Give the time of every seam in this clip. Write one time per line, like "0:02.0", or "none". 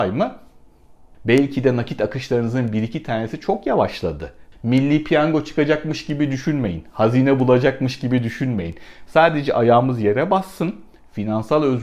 0:01.1
0:04.5
0:09.1